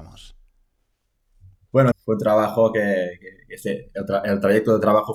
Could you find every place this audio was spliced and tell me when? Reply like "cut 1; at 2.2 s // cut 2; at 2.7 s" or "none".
cut 1; at 1.9 s